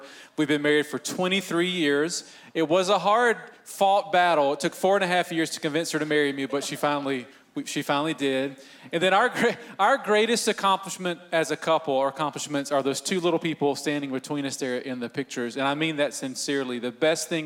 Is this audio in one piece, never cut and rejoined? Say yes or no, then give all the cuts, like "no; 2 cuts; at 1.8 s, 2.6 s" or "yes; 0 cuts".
yes; 0 cuts